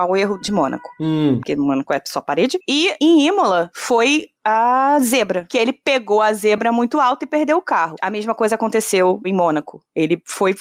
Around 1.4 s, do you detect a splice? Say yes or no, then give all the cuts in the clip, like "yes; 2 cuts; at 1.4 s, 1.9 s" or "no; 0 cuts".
yes; 1 cut; at 1.4 s